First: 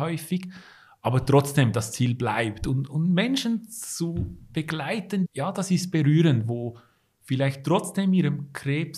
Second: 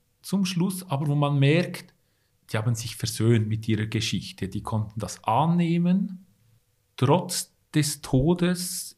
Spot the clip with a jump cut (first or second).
first